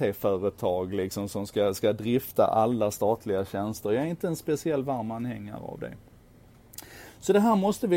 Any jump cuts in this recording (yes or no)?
no